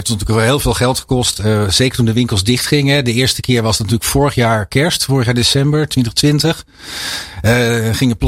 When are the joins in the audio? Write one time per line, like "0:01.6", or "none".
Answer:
none

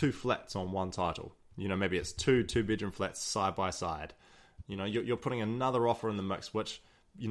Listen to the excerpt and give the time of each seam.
0:04.6

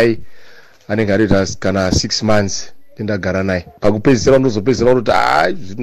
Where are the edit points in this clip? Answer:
0:03.8

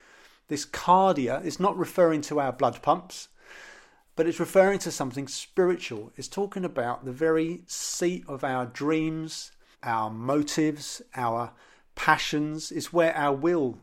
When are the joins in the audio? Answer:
0:09.7

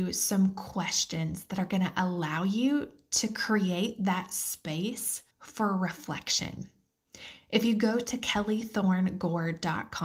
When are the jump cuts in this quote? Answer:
0:05.3

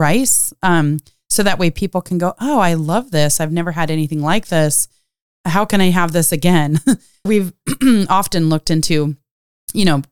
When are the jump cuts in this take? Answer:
0:07.3

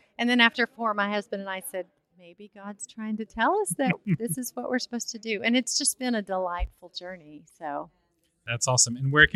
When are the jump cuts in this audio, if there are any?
none

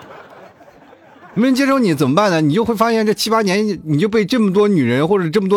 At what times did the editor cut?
none

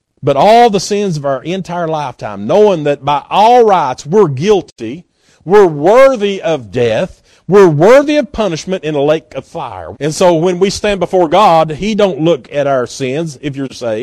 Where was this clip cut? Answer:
0:09.9

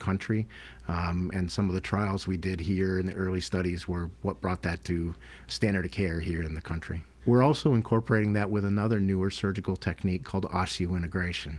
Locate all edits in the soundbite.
0:07.2

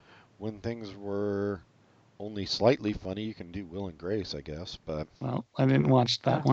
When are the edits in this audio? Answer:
0:05.1

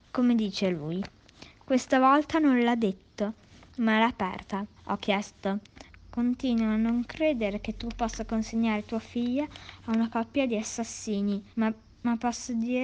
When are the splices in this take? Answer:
0:04.8
0:05.9
0:11.5

